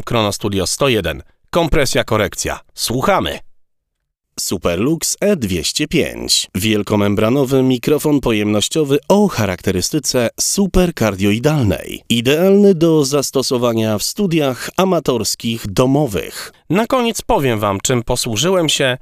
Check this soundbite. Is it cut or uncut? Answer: cut